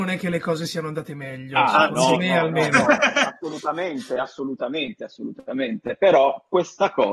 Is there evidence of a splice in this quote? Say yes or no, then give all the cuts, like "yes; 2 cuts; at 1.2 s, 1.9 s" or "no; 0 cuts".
no; 0 cuts